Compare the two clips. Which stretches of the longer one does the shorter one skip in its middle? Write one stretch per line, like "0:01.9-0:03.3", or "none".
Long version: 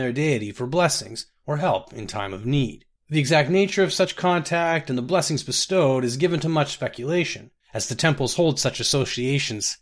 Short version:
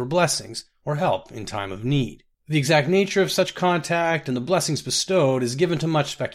none

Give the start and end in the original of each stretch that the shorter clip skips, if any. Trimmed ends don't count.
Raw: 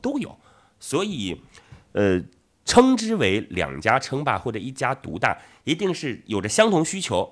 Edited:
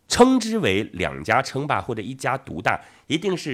none

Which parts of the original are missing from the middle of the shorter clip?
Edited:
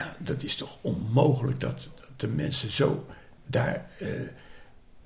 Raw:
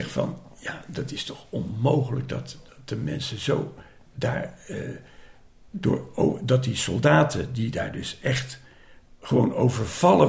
none

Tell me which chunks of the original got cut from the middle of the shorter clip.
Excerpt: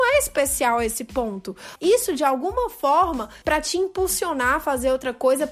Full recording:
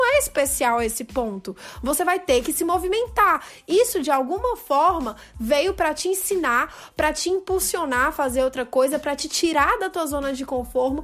0:01.7-0:03.6
0:05.3-0:06.9

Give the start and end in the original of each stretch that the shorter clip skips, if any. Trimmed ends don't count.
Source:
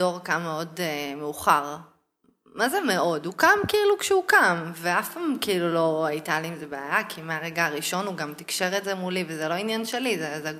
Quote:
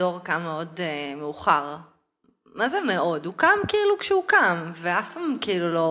none

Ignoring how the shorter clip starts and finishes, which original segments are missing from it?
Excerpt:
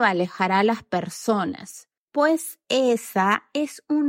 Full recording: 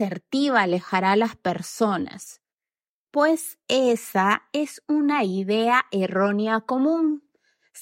0:02.5-0:03.0

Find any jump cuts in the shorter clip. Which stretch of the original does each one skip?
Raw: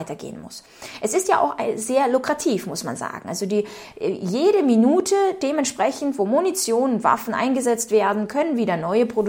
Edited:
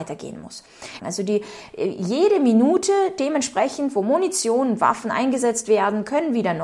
0:01.0-0:03.2

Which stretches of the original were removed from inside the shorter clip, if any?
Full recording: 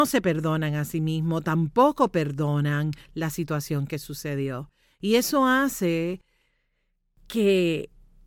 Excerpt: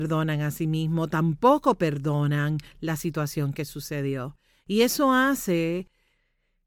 none

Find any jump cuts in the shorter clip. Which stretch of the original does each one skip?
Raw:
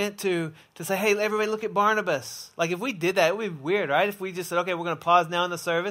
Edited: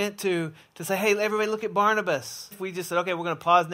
0:02.5-0:04.1

